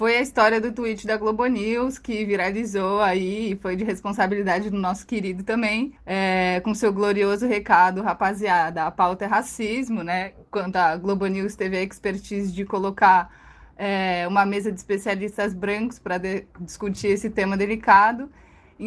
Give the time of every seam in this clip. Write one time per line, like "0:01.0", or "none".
0:06.0